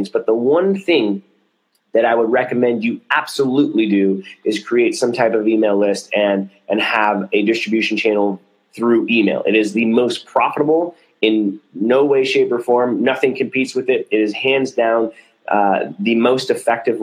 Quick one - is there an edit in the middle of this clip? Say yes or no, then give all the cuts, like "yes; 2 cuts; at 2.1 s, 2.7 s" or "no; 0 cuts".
no; 0 cuts